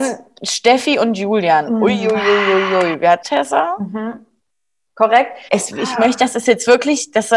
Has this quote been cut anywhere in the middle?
yes; 2 cuts; at 3.2 s, 5.5 s

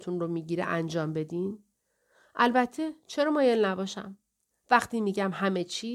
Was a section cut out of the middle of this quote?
yes; 1 cut; at 4.5 s

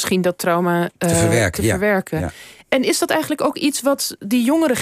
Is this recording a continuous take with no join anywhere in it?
no; 1 cut; at 1.0 s

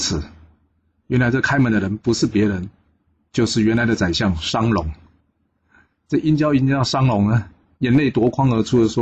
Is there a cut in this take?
no; 0 cuts

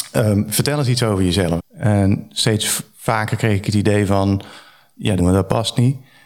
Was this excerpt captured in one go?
no; 2 cuts; at 1.6 s, 5.2 s

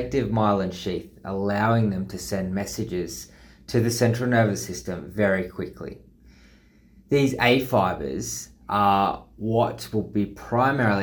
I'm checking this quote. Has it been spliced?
no; 0 cuts

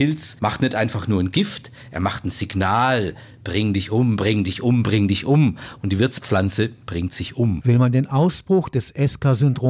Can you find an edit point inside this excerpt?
no; 0 cuts

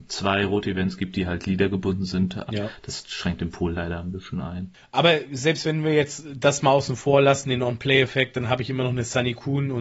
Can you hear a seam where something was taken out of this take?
yes; 1 cut; at 2.5 s

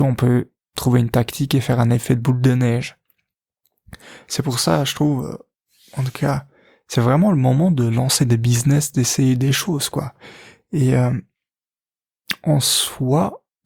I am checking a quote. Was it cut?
no; 0 cuts

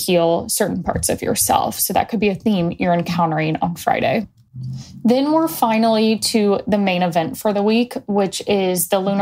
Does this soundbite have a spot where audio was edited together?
no; 0 cuts

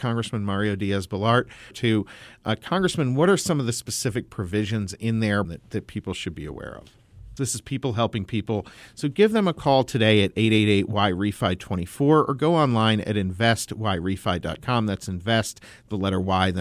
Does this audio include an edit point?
yes; 3 cuts; at 1.7 s, 5.4 s, 7.4 s

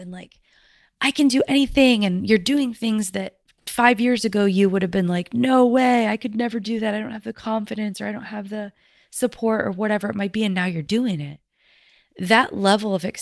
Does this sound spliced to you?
no; 0 cuts

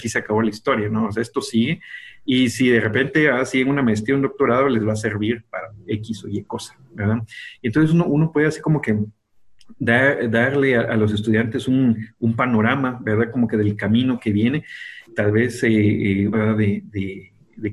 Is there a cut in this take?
yes; 2 cuts; at 15.1 s, 16.3 s

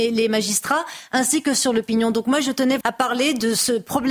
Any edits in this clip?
yes; 1 cut; at 2.8 s

